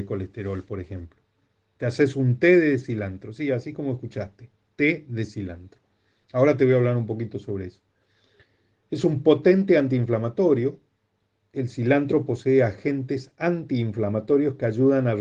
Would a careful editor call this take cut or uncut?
uncut